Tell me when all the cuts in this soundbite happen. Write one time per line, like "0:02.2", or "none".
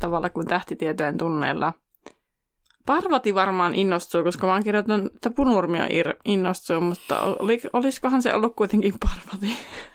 none